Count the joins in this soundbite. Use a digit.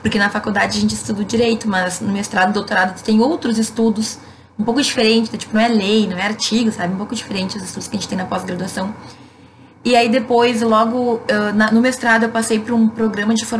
0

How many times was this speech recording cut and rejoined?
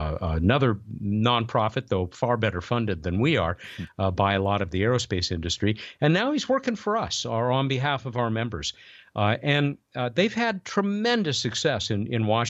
0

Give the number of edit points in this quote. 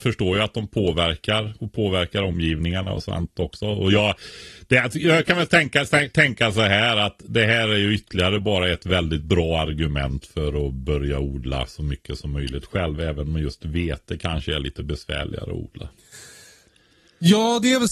0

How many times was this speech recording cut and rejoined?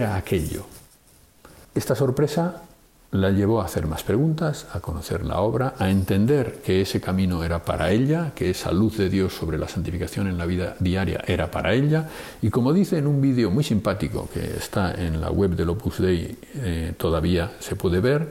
1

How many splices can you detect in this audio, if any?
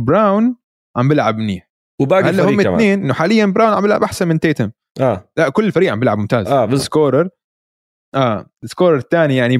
1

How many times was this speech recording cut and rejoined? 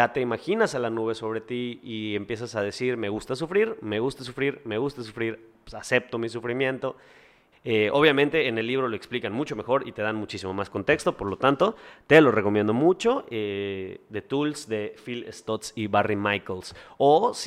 1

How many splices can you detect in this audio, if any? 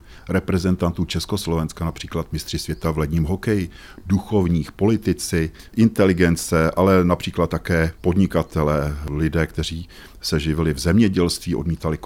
0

